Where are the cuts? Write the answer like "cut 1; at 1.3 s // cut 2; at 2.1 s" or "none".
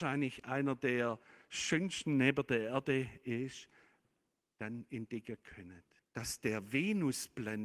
cut 1; at 6.0 s